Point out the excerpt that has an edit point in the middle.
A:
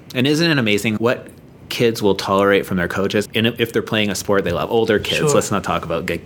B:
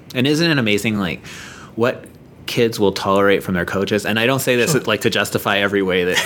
A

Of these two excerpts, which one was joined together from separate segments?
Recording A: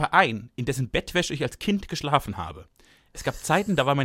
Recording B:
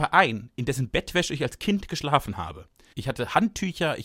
B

